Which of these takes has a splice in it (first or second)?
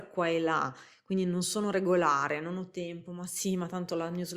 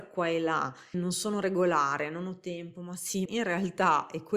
second